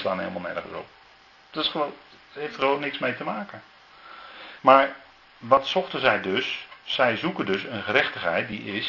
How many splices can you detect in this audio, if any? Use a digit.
0